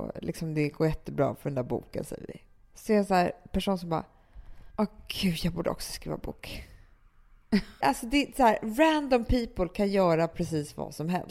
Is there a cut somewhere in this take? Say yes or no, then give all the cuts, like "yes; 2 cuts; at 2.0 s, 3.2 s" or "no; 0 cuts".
yes; 2 cuts; at 4.7 s, 7.8 s